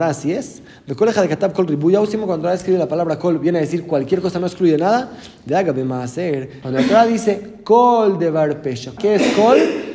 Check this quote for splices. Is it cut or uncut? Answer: cut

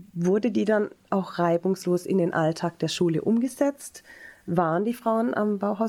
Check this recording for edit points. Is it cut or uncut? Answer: uncut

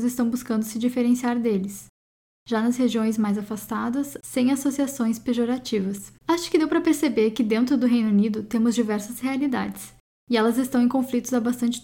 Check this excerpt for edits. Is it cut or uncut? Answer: cut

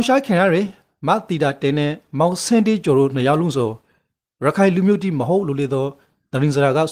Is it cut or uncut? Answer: uncut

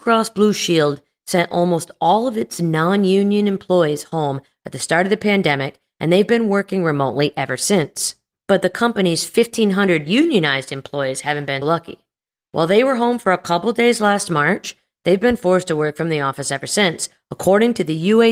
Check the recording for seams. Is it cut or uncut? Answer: cut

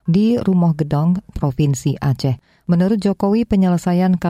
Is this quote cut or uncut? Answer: cut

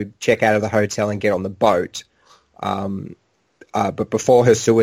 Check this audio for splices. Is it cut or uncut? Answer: uncut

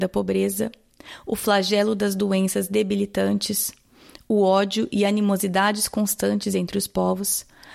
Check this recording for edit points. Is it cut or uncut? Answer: uncut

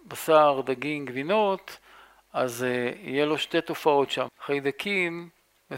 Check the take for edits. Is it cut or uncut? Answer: cut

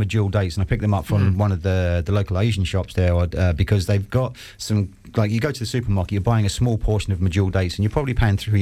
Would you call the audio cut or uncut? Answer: uncut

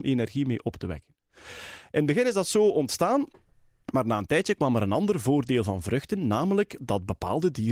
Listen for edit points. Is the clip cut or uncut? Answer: uncut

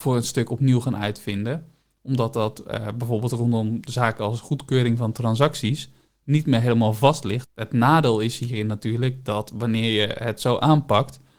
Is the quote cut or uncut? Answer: cut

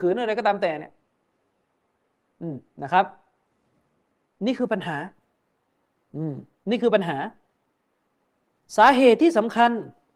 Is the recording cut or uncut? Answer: uncut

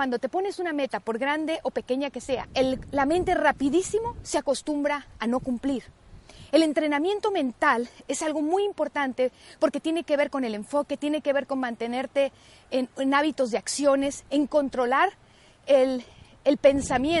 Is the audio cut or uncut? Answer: cut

